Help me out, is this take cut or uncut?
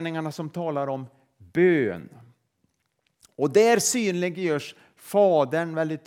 uncut